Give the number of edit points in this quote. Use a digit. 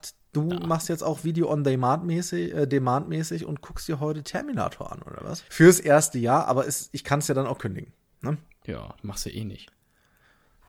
1